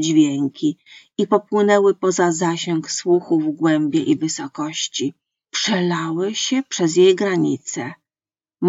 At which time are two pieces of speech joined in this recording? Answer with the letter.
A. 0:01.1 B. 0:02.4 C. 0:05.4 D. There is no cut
C